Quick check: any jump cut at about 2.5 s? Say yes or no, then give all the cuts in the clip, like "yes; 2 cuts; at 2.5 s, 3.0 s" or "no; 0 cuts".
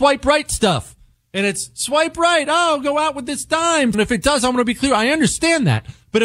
no; 1 cut; at 3.9 s